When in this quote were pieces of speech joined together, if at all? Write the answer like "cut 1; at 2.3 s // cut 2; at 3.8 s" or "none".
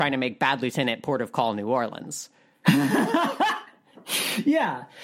none